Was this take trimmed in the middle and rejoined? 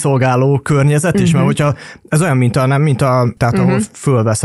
yes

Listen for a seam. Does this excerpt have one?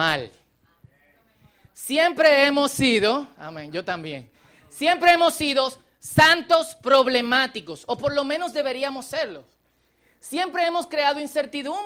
no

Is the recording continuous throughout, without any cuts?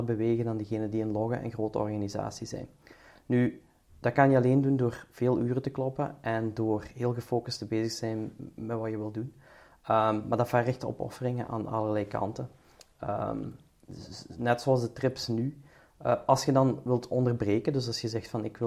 yes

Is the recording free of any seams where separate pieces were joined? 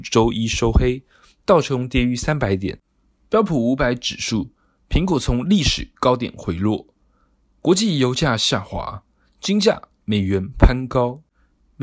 yes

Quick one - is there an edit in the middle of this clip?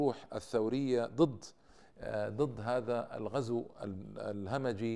no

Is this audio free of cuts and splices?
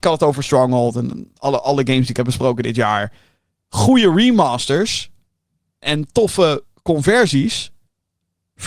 no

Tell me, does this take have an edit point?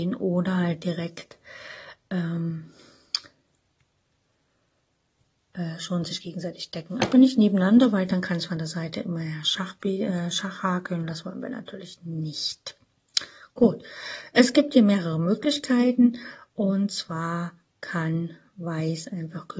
no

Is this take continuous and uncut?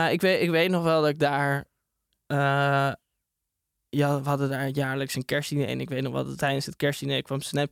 no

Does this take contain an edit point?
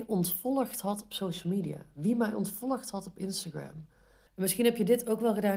yes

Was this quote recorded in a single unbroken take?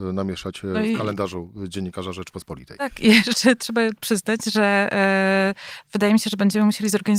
yes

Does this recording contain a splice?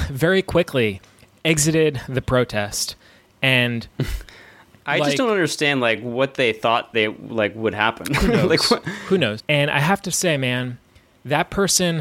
yes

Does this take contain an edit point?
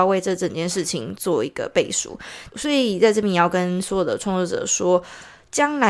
yes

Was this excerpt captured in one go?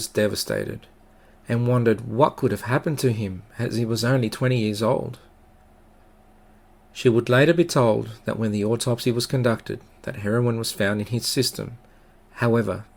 yes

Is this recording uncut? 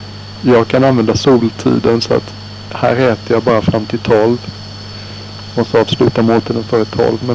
yes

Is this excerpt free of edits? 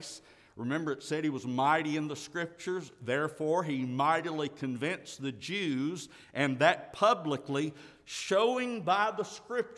yes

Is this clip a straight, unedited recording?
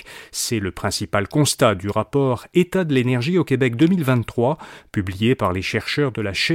yes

